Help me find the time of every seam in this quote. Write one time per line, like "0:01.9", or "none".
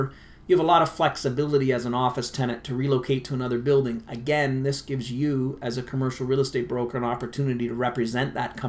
none

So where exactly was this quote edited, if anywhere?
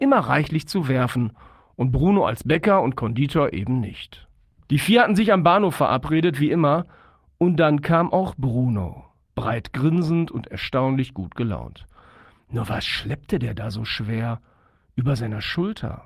0:04.6

